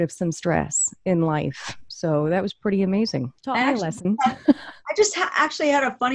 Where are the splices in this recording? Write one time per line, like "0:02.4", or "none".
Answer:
0:03.4